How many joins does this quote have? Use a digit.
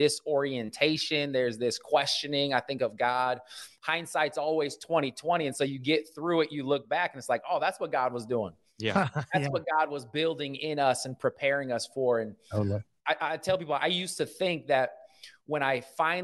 0